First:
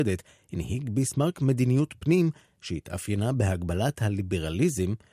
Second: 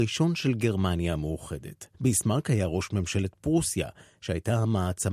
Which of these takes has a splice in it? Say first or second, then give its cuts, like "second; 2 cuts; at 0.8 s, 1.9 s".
second; 1 cut; at 1.9 s